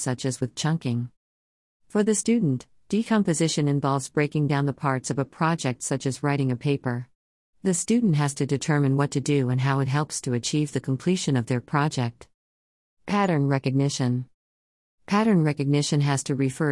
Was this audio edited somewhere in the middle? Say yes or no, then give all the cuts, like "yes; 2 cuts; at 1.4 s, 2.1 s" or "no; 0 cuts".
no; 0 cuts